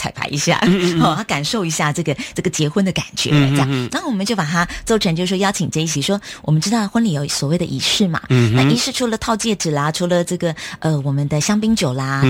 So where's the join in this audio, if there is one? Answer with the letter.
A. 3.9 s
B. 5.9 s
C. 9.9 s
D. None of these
B